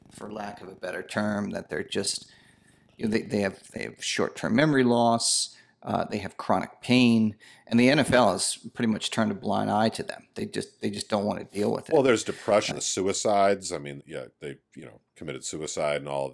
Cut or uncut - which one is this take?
cut